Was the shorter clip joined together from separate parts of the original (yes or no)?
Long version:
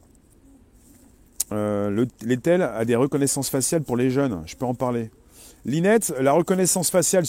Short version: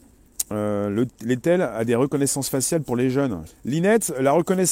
yes